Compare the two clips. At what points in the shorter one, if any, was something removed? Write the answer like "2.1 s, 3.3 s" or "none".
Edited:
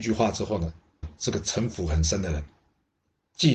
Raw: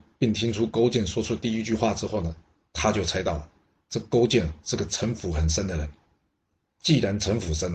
1.0 s

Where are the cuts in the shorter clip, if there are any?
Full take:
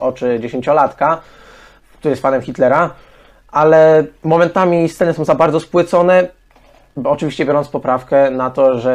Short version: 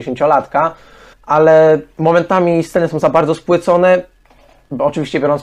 1.1 s

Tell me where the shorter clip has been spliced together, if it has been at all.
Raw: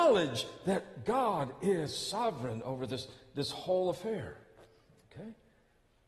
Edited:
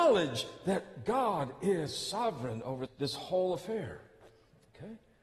2.9 s

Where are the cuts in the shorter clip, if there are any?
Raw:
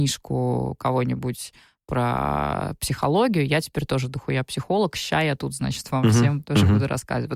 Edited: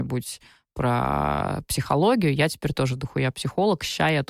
none

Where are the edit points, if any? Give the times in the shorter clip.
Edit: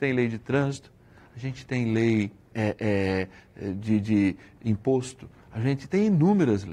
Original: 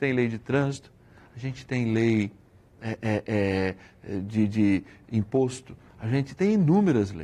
2.5 s

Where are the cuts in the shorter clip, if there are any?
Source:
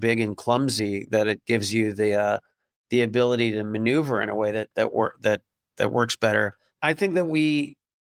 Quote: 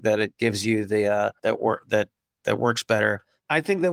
1.4 s

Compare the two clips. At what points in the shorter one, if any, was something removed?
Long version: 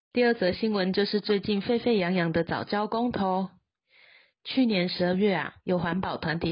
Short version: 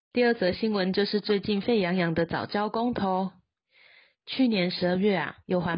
1.6 s

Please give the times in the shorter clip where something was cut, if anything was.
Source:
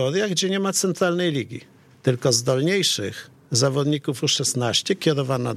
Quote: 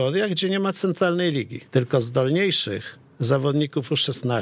1.7 s

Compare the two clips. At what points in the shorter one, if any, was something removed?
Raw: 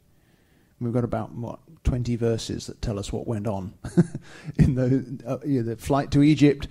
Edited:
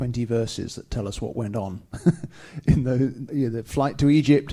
3.3 s

